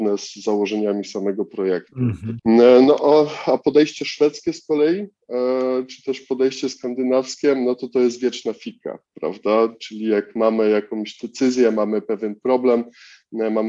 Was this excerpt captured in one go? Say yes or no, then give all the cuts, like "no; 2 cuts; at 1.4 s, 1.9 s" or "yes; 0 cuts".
no; 1 cut; at 2.4 s